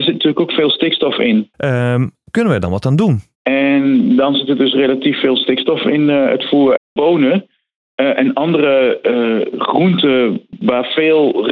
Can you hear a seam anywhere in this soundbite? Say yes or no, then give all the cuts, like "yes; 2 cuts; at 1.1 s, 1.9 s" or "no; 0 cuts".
yes; 3 cuts; at 1.5 s, 3.3 s, 6.8 s